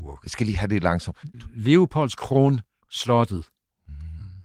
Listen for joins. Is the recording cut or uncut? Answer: cut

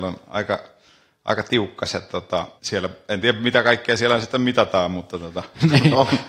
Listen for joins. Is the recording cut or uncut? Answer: cut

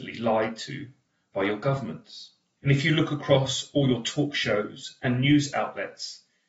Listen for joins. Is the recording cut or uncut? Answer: cut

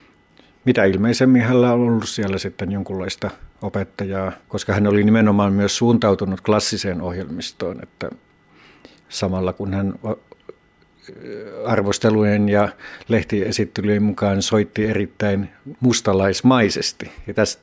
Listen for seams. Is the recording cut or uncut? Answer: cut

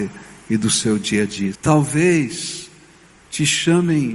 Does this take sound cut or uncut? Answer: cut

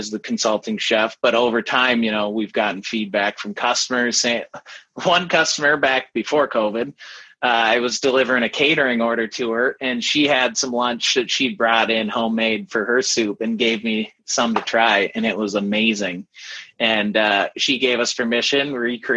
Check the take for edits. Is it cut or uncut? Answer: uncut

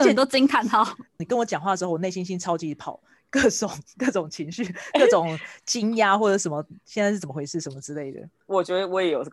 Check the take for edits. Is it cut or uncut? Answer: cut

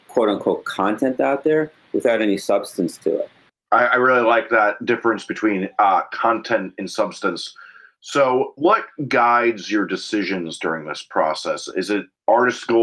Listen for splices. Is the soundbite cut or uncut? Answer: uncut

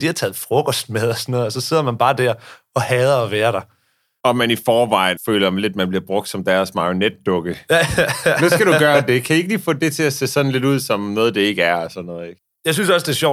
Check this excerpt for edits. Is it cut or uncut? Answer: cut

